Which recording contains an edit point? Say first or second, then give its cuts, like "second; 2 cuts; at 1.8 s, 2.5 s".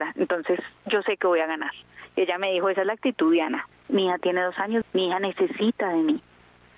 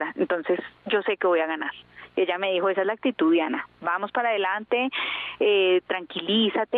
first; 2 cuts; at 3.7 s, 4.8 s